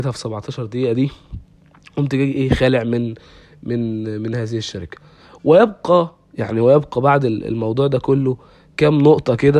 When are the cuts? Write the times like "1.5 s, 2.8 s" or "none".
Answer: none